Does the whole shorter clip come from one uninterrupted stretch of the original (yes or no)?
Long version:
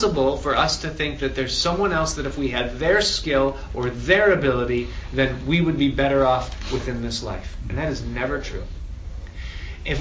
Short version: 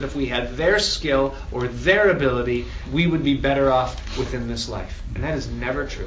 no